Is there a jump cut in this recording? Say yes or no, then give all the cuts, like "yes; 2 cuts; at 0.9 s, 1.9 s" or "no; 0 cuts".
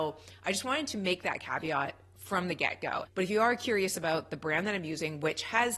no; 0 cuts